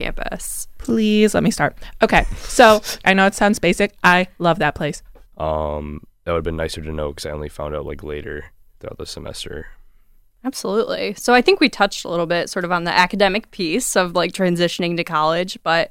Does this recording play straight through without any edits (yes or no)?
no